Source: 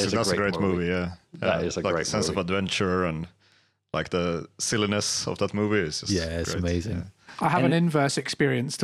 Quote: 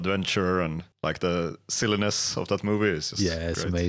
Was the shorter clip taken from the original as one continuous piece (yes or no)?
no